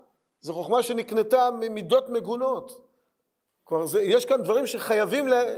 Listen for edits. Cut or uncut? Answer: uncut